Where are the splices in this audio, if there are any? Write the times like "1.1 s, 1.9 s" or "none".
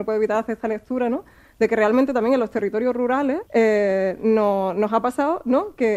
3.5 s